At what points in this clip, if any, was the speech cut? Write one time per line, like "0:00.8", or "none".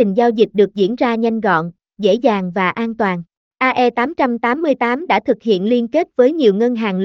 0:03.4